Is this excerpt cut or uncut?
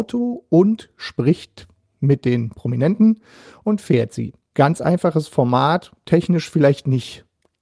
uncut